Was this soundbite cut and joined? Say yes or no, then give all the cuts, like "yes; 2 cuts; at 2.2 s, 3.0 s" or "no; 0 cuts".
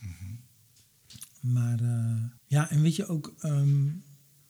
yes; 1 cut; at 2.4 s